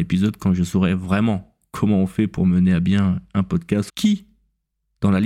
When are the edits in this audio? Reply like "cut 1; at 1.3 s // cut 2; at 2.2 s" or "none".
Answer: cut 1; at 3.9 s